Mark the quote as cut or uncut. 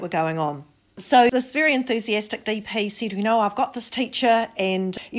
uncut